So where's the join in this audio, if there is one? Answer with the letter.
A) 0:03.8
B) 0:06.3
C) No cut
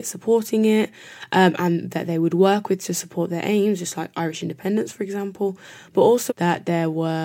B